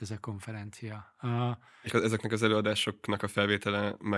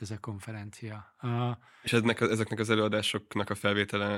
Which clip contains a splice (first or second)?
first